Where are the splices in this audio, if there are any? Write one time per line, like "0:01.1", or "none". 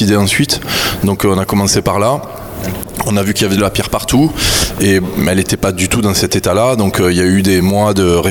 none